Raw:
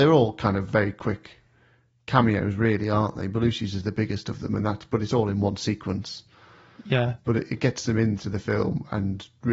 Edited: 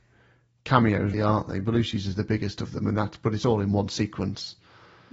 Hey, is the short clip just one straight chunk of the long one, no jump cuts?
no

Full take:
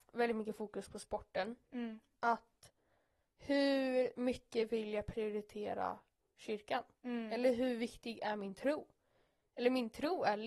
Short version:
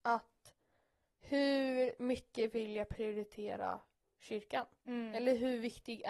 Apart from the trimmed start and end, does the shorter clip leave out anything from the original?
no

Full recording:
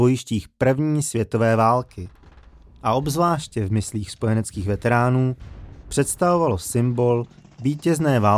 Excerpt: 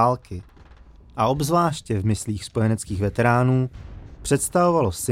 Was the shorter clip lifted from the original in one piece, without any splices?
yes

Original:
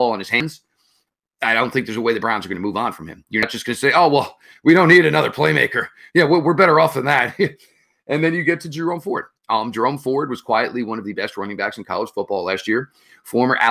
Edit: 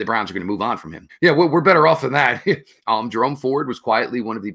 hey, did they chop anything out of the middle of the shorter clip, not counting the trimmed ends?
yes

